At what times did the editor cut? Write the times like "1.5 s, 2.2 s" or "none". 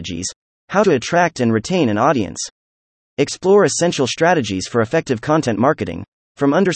3.1 s